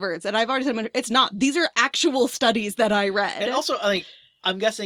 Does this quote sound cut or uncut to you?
uncut